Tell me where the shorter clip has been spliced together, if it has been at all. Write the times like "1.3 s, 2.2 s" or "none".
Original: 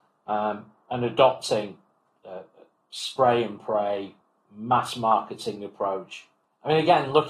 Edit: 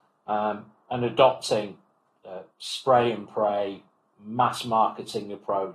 2.5 s